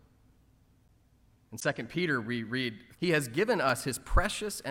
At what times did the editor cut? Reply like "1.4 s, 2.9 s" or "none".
1.3 s, 2.9 s